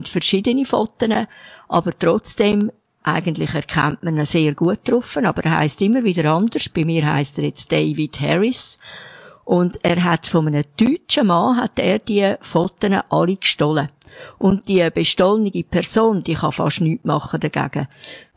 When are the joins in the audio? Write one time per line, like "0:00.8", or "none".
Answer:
none